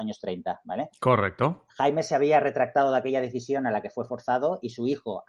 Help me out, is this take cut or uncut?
uncut